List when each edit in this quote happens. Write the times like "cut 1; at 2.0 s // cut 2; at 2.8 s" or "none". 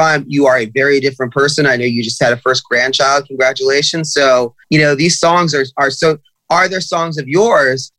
cut 1; at 4.6 s